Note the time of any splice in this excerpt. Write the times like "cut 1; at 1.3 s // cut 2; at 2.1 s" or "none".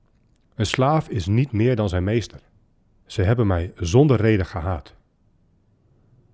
cut 1; at 3.0 s